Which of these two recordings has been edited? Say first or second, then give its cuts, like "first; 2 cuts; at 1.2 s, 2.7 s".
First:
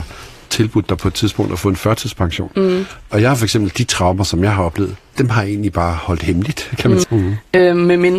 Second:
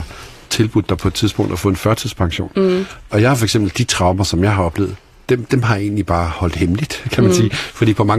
first; 2 cuts; at 5.1 s, 7.0 s